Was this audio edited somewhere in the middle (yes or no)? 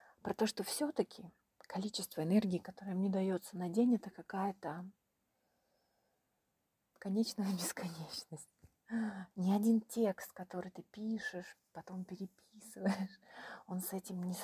yes